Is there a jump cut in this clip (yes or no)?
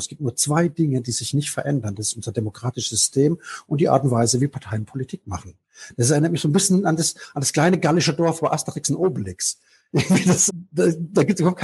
yes